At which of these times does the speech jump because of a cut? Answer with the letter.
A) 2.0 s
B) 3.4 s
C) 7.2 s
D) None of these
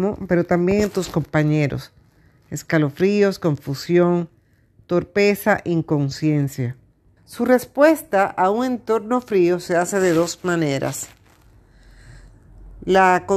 C